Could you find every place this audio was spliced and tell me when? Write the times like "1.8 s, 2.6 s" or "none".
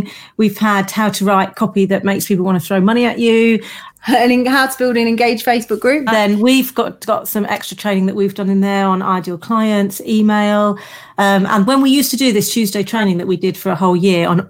6.1 s, 11.7 s